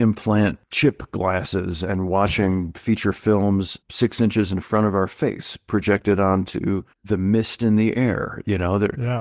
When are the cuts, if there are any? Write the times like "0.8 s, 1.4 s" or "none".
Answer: 3.8 s, 6.9 s